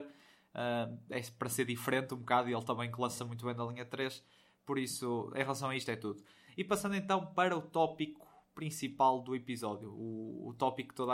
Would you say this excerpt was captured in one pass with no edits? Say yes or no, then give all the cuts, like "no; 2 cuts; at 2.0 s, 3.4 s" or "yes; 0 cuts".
yes; 0 cuts